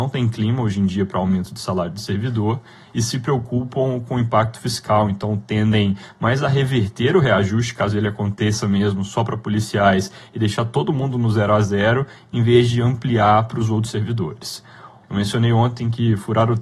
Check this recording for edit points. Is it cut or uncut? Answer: cut